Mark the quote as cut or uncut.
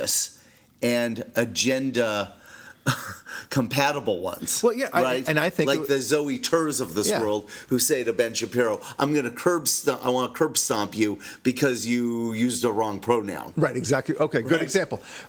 uncut